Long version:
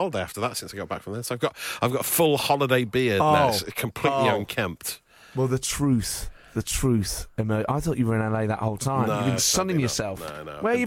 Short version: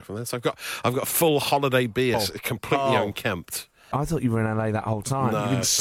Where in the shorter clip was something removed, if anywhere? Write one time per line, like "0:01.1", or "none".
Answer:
0:02.1
0:03.9